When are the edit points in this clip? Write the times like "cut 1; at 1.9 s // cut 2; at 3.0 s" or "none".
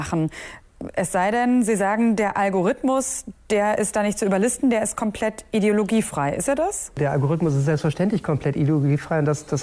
none